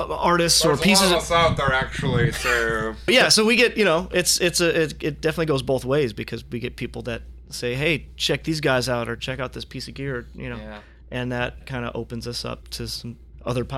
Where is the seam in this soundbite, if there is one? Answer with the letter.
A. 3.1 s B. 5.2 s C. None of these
A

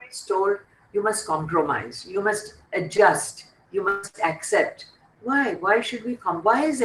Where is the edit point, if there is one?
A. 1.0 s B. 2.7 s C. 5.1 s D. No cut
B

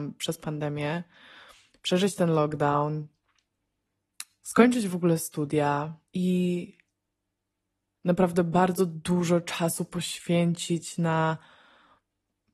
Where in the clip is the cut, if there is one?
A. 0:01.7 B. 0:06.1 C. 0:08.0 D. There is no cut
B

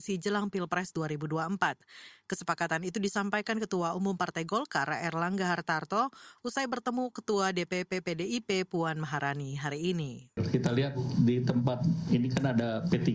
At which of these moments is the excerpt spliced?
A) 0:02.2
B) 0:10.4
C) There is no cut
B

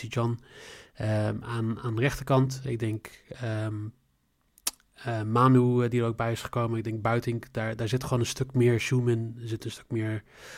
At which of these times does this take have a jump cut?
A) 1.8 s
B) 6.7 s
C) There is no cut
C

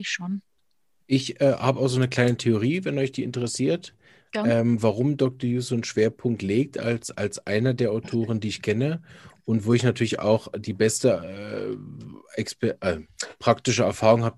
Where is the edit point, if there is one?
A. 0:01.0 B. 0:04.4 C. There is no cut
A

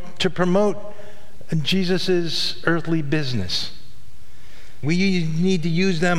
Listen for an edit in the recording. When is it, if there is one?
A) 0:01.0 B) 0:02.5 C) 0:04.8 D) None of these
C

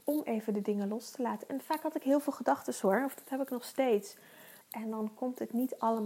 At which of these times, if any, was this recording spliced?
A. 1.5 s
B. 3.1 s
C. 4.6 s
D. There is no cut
C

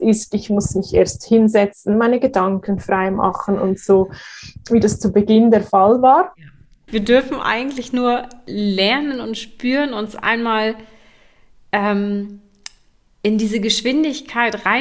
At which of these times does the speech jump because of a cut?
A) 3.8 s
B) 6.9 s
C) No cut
B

